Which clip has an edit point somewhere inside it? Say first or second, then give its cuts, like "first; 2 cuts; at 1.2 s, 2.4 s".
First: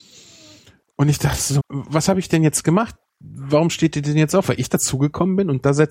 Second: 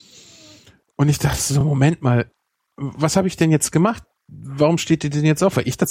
first; 1 cut; at 1.6 s